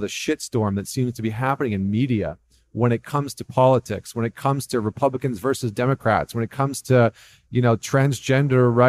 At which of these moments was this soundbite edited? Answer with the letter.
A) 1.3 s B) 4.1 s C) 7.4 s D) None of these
D